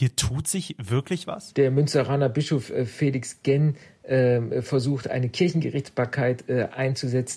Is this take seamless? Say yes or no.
no